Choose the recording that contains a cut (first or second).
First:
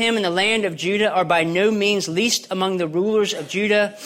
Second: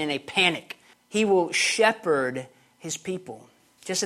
second